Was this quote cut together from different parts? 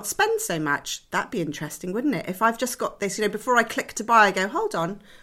no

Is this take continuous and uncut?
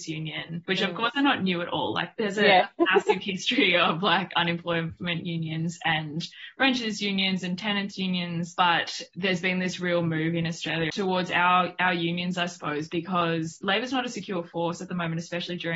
yes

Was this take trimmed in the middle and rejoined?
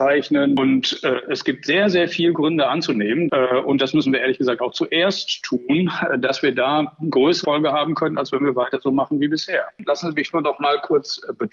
yes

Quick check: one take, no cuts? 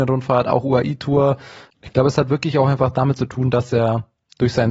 no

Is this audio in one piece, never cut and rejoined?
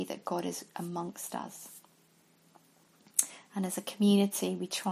yes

